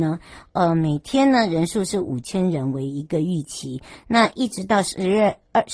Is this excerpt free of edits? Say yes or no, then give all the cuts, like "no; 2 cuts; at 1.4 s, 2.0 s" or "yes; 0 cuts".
yes; 0 cuts